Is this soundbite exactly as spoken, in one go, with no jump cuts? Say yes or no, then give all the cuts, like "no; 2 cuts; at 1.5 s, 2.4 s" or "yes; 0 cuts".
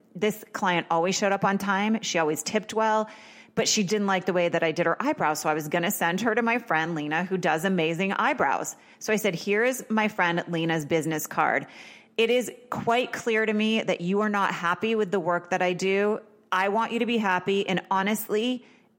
no; 1 cut; at 3.9 s